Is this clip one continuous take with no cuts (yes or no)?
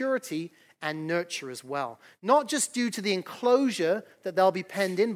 yes